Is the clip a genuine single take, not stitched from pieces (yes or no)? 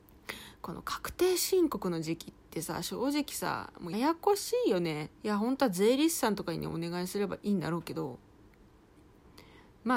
no